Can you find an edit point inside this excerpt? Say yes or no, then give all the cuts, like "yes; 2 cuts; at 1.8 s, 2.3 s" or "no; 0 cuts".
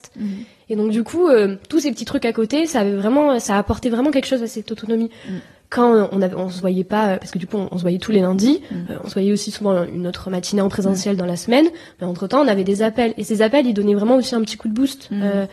no; 0 cuts